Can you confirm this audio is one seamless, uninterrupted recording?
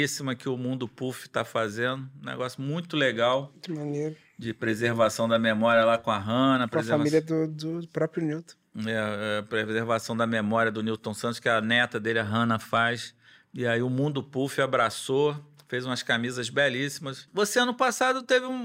yes; 0 cuts

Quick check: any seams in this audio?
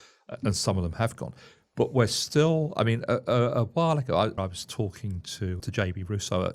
yes; 2 cuts; at 4.4 s, 5.6 s

